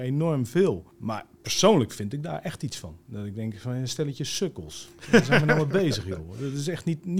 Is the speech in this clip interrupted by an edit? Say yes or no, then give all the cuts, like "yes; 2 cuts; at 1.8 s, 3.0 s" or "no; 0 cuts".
no; 0 cuts